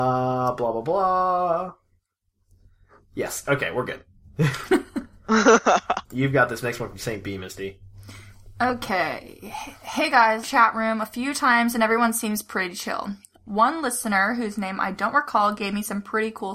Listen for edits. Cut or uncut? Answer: cut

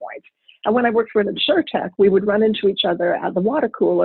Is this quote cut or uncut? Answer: uncut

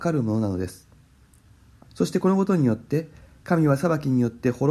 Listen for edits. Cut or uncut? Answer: cut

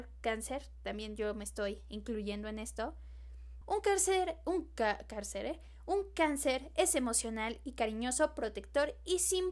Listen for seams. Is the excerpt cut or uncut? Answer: cut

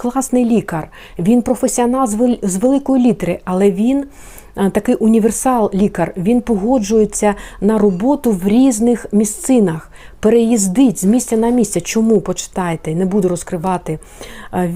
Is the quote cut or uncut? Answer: uncut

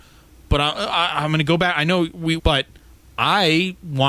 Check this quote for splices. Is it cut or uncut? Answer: cut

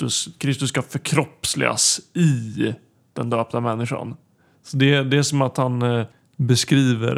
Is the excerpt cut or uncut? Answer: uncut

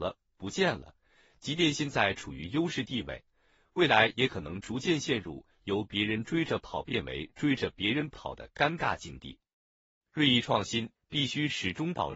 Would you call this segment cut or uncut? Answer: cut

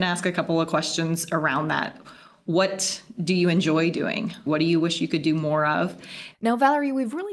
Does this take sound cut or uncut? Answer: cut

